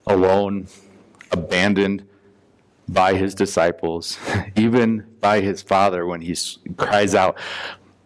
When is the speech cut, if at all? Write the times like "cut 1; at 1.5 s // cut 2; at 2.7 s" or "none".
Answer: none

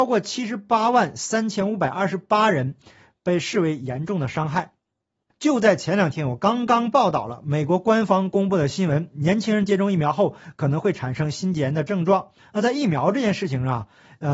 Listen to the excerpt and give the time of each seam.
cut 1; at 5.3 s // cut 2; at 12.4 s

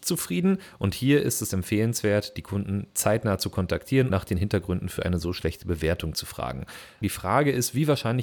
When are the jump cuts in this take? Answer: cut 1; at 4.1 s // cut 2; at 7.0 s

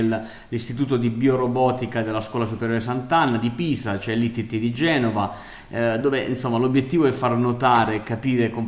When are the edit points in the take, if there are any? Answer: none

